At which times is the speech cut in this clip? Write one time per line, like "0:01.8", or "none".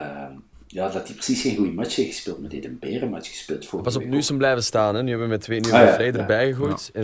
none